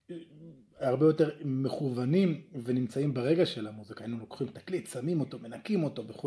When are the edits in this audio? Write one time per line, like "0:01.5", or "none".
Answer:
none